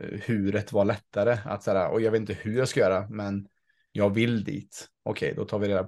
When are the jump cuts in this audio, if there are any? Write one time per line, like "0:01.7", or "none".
none